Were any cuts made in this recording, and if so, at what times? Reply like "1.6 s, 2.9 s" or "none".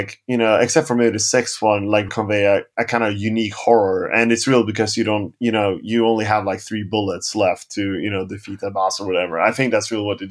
2.1 s